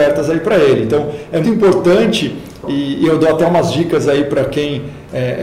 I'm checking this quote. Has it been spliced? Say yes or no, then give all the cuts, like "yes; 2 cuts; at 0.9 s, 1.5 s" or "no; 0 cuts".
yes; 1 cut; at 1.4 s